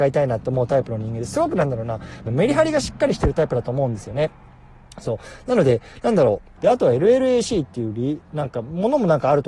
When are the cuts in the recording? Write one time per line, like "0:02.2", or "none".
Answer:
0:02.3
0:06.6